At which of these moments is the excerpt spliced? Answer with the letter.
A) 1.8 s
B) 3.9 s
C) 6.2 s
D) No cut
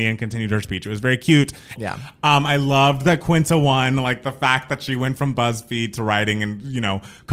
A